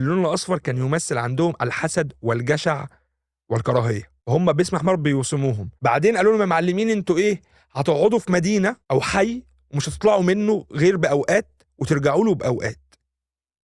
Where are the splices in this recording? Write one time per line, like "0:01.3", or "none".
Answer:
0:04.2
0:05.8
0:08.8